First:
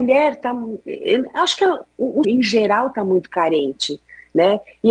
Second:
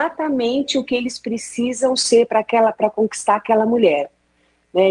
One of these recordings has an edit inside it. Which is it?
first; 1 cut; at 2.2 s

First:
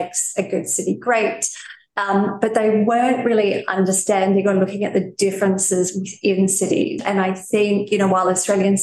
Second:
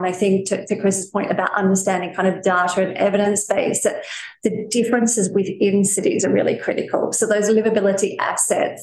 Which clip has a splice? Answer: first; 1 cut; at 7.0 s

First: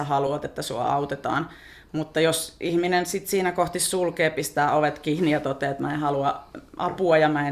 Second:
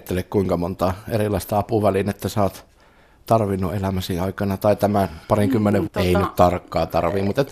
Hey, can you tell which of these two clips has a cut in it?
second; 1 cut; at 5.9 s

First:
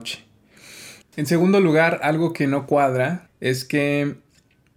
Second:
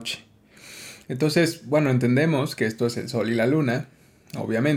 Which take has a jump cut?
first; 2 cuts; at 1.0 s, 3.3 s

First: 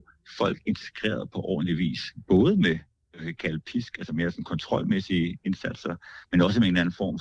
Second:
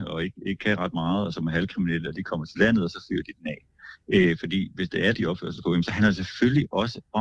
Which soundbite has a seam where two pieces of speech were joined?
second; 1 cut; at 5.1 s

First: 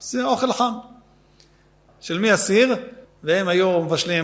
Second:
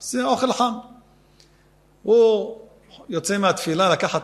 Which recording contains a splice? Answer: first; 2 cuts; at 1.9 s, 3.0 s

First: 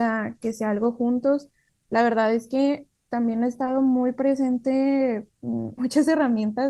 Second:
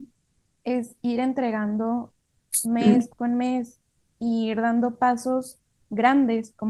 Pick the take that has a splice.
first; 1 cut; at 5.8 s

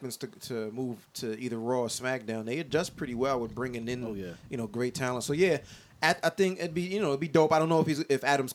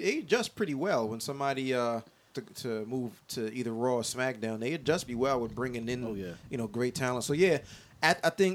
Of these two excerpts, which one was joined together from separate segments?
second; 2 cuts; at 2.3 s, 5.1 s

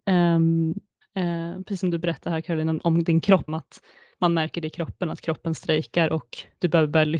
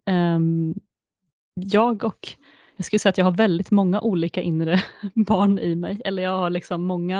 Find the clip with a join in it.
first; 2 cuts; at 1.0 s, 3.5 s

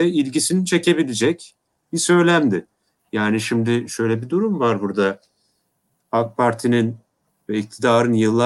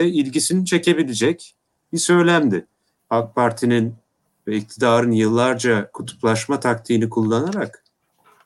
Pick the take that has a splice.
second; 1 cut; at 3.0 s

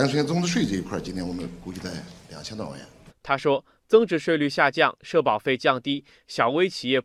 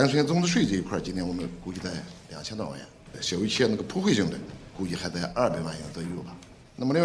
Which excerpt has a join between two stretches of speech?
first; 2 cuts; at 3.1 s, 4.2 s

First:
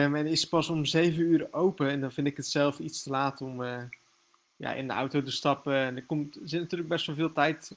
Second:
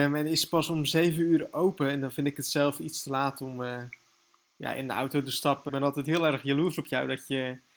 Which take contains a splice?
second; 1 cut; at 5.7 s

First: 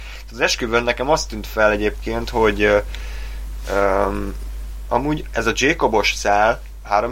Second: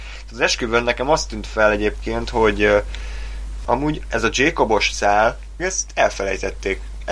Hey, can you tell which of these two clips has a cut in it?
second; 2 cuts; at 3.6 s, 5.6 s

